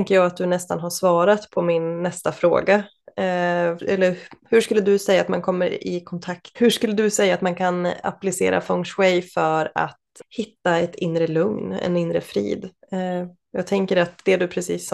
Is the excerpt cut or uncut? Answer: cut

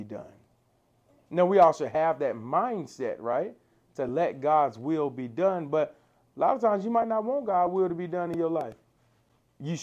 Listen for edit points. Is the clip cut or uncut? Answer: uncut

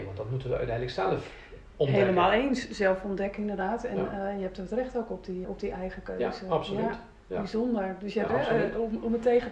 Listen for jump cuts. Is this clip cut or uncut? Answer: cut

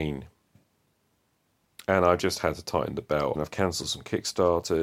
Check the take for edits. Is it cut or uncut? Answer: cut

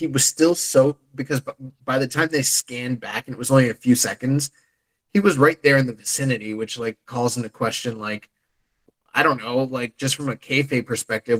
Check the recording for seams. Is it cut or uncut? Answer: uncut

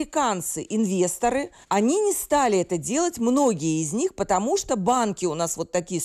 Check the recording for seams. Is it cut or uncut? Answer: cut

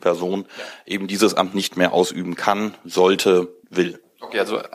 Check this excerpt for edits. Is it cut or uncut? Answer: cut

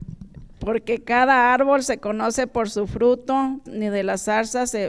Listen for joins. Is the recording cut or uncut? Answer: cut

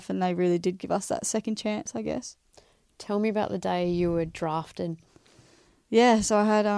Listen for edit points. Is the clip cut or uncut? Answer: uncut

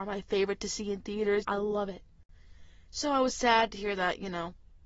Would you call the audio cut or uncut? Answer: cut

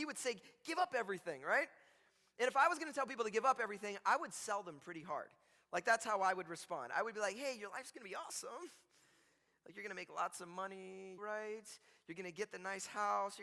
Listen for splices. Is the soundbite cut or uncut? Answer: cut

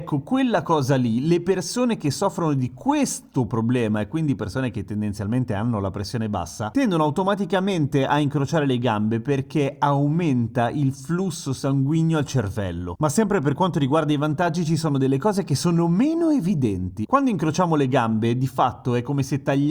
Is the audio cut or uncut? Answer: cut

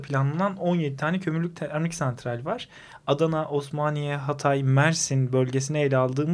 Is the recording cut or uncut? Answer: uncut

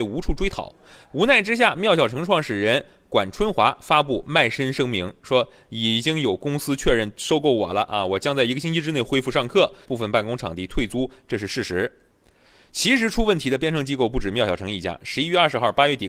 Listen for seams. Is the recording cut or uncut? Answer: cut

